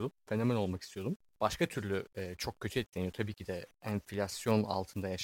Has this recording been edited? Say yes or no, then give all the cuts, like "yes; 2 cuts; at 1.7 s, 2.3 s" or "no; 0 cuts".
yes; 1 cut; at 1.3 s